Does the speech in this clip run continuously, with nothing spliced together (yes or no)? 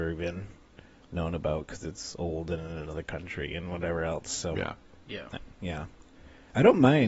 yes